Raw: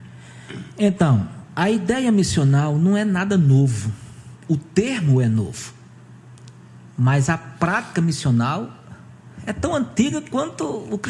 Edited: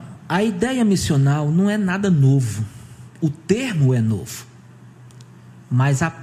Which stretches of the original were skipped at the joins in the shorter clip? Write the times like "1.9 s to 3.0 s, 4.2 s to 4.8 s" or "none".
none